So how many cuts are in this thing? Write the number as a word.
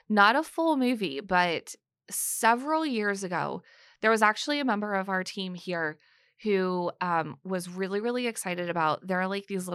zero